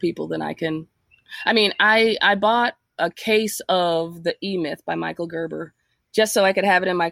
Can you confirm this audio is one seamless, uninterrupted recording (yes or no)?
yes